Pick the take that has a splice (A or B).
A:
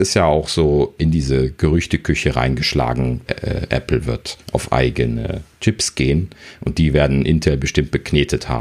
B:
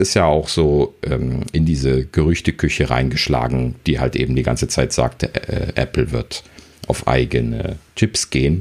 A